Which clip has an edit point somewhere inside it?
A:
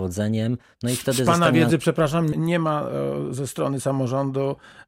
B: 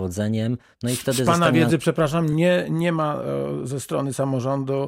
A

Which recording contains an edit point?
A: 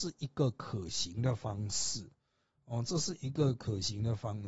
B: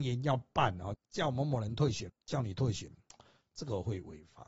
B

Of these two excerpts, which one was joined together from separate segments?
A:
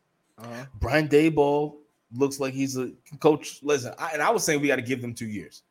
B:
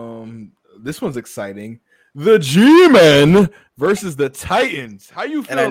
A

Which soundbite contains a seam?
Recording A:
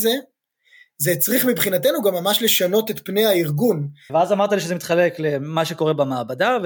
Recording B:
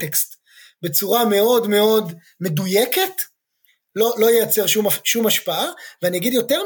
A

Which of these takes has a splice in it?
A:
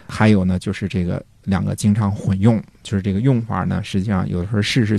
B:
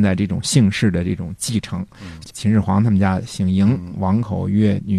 B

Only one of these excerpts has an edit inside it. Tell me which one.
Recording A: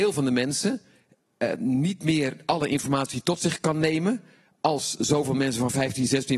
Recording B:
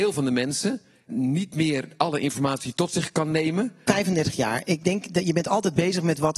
B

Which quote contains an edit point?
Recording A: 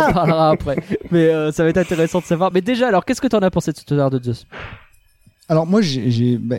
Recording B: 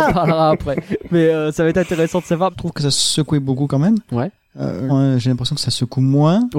B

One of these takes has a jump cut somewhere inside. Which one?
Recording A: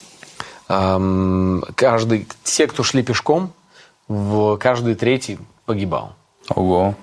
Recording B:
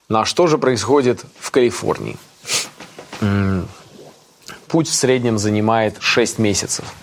B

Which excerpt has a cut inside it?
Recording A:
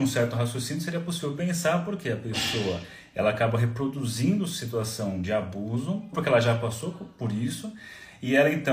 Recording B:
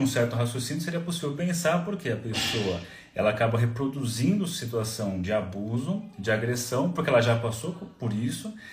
A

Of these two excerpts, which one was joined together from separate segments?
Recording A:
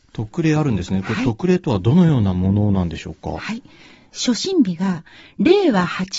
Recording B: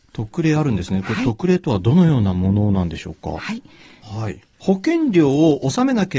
B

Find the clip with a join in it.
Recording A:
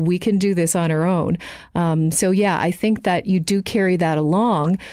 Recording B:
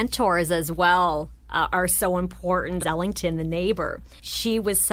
B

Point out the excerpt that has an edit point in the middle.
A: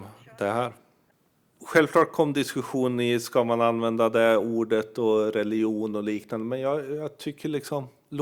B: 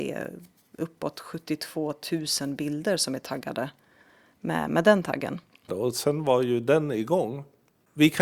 B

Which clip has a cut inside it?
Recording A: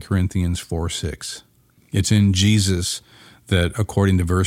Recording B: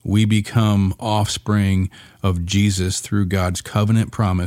A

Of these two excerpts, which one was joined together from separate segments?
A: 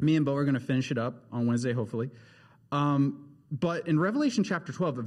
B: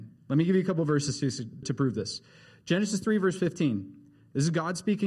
B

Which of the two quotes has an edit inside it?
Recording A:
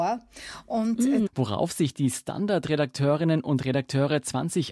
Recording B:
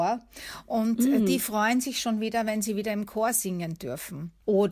A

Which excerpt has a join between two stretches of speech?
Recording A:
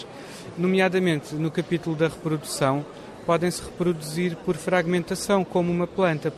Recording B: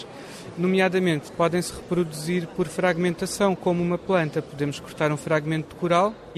B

